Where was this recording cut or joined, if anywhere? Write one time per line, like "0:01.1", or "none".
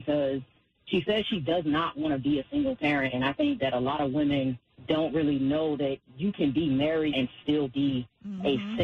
0:07.1